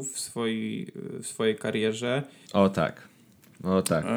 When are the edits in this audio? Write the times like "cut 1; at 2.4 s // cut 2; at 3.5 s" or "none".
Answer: cut 1; at 2.5 s